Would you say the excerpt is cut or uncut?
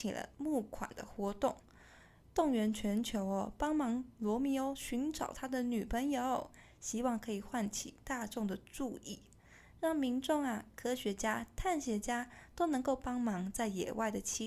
uncut